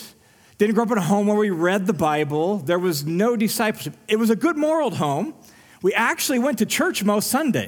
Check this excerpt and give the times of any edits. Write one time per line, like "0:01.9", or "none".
none